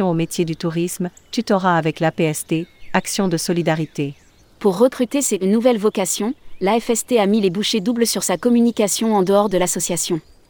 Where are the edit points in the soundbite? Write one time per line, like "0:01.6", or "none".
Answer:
0:04.4